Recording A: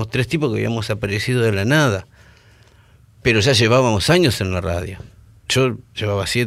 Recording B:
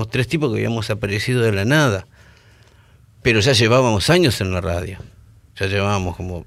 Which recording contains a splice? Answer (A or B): A